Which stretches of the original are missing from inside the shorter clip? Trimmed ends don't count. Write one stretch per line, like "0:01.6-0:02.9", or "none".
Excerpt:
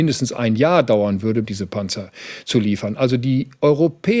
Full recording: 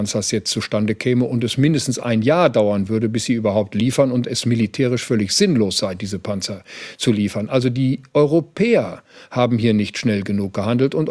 0:03.1-0:06.0